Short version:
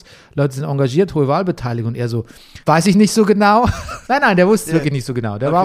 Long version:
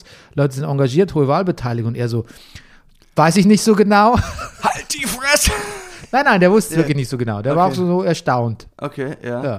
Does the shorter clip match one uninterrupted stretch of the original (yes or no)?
no